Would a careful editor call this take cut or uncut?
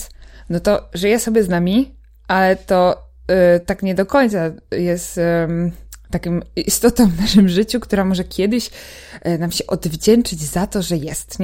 uncut